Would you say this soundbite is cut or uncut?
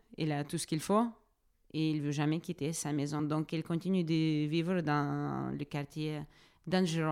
uncut